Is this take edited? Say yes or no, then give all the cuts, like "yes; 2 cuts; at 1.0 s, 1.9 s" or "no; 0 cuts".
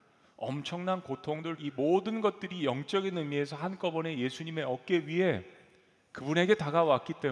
yes; 1 cut; at 1.6 s